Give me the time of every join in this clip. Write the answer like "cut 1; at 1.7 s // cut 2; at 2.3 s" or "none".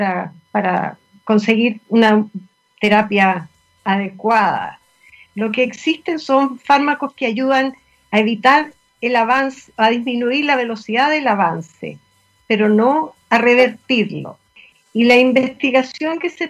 none